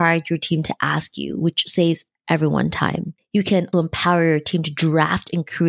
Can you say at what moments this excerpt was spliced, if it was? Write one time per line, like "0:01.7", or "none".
0:03.7